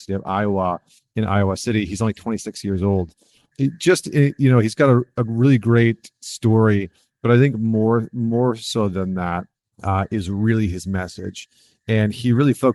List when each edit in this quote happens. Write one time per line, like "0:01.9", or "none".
none